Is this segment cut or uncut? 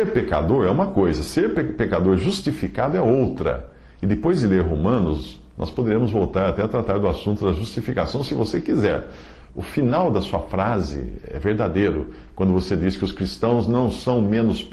cut